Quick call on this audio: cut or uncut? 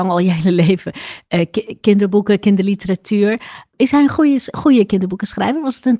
uncut